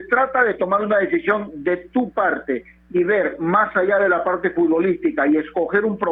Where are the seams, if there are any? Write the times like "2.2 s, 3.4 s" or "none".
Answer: none